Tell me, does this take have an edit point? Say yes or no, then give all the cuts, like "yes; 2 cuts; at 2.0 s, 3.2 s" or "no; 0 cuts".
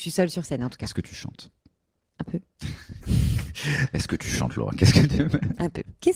no; 0 cuts